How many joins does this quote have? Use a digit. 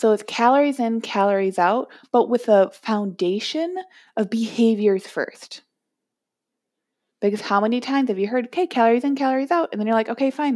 0